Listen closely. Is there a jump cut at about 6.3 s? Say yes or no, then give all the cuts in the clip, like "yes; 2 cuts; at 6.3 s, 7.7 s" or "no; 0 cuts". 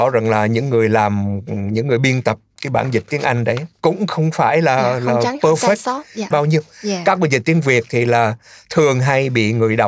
yes; 1 cut; at 6.3 s